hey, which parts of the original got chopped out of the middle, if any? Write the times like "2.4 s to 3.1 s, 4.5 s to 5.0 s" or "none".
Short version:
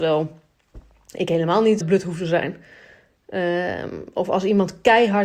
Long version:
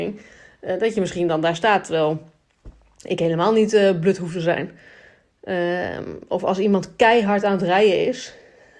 3.7 s to 3.9 s

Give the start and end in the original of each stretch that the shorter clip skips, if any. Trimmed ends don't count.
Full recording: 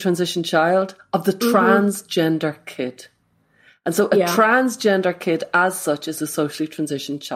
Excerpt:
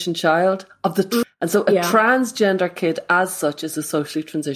1.5 s to 3.7 s

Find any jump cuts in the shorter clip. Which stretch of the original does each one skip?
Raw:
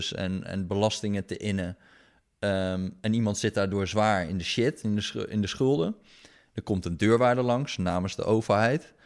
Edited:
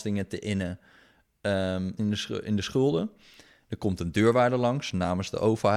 2.9 s to 4.8 s

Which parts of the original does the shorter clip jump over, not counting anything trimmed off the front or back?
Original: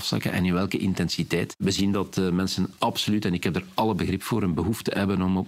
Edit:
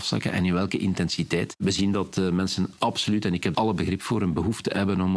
3.5 s to 3.7 s

